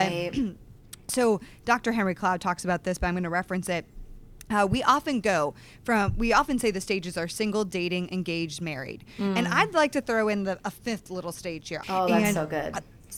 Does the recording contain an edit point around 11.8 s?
yes; 1 cut; at 11.8 s

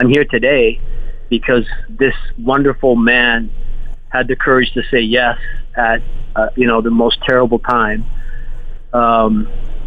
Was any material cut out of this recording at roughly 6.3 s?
no; 0 cuts

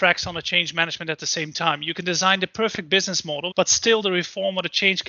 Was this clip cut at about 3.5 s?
yes; 1 cut; at 3.5 s

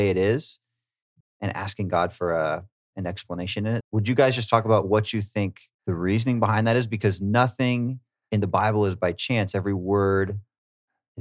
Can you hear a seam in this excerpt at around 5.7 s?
yes; 3 cuts; at 1.2 s, 3.8 s, 5.7 s

